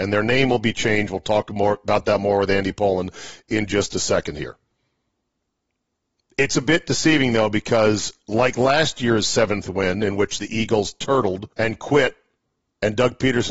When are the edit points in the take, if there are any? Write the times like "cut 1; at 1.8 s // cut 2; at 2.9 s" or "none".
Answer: cut 1; at 11.5 s